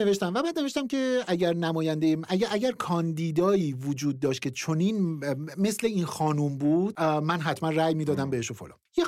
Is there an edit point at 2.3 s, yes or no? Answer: no